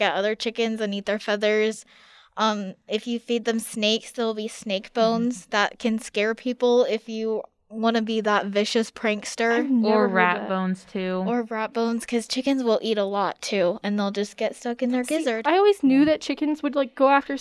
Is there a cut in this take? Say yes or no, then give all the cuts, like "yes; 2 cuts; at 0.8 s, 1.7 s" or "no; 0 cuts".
no; 0 cuts